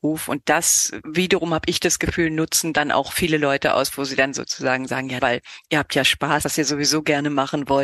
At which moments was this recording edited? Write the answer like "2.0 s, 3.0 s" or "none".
5.2 s, 6.4 s